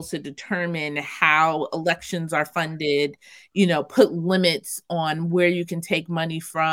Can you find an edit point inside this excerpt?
no; 0 cuts

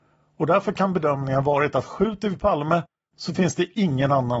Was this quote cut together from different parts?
no; 0 cuts

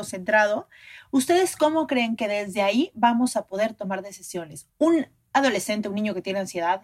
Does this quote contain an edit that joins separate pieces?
yes; 1 cut; at 4.7 s

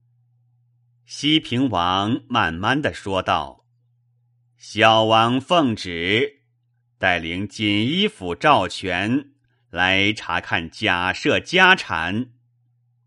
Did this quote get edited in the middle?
no; 0 cuts

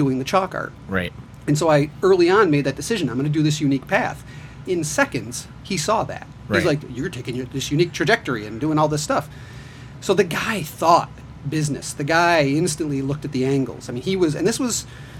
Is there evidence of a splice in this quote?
yes; 1 cut; at 4.6 s

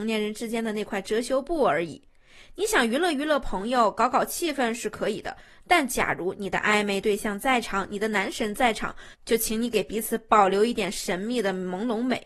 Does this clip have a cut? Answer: no; 0 cuts

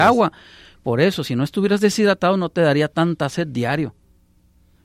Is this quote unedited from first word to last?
yes; 0 cuts

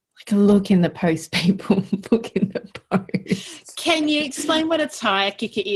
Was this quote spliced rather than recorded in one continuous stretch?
no; 0 cuts

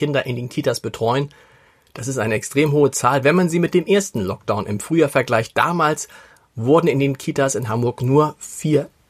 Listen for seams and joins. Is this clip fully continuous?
yes; 0 cuts

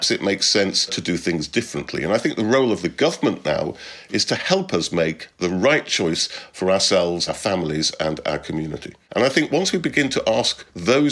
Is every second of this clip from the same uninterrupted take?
no; 2 cuts; at 7.3 s, 9.1 s

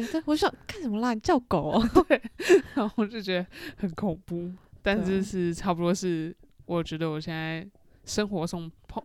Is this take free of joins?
yes; 0 cuts

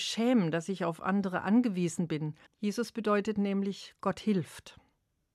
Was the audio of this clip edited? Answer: yes; 1 cut; at 2.5 s

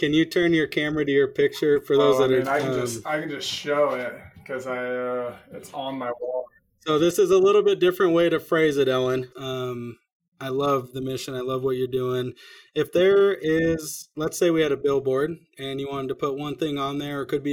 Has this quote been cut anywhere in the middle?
yes; 1 cut; at 9.3 s

